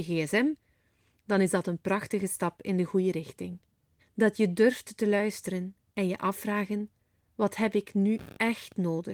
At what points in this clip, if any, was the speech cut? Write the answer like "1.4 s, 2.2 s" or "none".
4.0 s